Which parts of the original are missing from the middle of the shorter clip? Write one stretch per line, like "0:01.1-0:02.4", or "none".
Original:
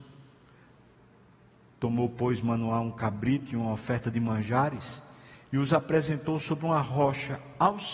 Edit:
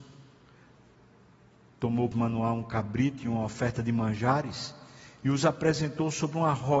0:02.1-0:02.4